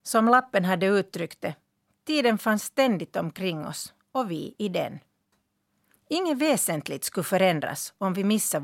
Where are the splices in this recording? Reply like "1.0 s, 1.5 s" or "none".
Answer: 5.9 s